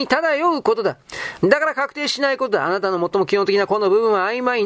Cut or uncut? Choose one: cut